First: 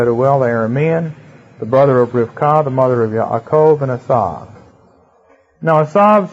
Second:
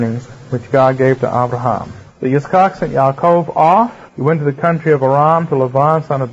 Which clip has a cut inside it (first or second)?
second